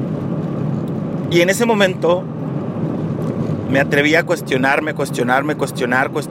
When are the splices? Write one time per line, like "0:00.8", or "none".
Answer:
none